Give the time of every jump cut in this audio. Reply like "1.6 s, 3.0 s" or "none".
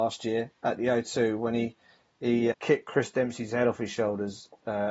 2.5 s